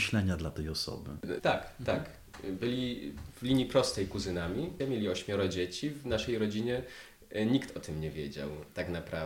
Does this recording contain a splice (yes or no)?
yes